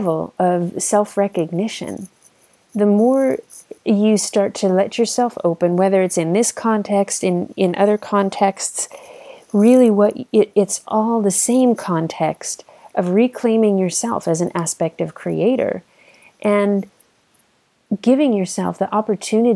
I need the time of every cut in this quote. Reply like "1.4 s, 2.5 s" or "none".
none